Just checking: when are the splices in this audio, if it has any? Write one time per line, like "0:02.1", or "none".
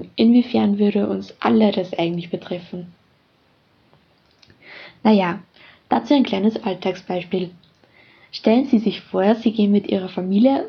none